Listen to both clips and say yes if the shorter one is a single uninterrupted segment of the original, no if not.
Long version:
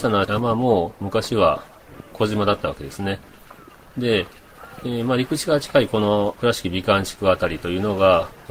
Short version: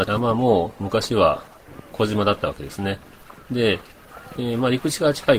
no